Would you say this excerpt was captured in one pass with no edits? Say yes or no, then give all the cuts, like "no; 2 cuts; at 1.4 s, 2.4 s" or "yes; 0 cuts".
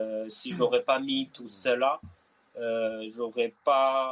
yes; 0 cuts